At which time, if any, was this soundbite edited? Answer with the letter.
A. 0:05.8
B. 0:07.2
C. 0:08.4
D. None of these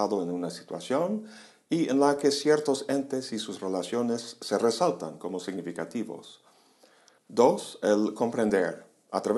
D